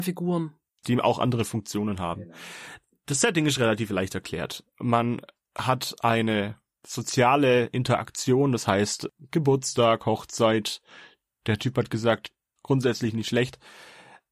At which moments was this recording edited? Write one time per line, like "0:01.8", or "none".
0:12.6